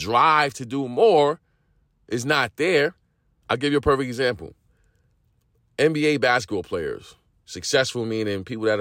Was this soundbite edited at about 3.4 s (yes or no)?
yes